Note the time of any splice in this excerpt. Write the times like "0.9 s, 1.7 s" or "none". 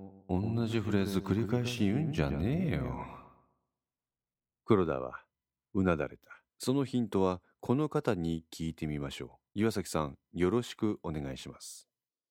6.5 s, 9.5 s